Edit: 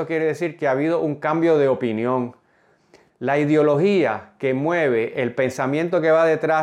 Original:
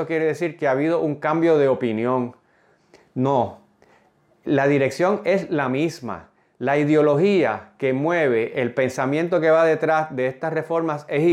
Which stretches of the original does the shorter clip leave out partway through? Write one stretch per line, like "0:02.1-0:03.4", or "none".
0:03.1-0:06.5